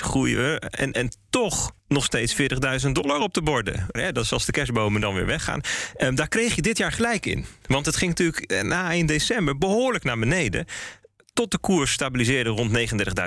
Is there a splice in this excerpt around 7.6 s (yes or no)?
no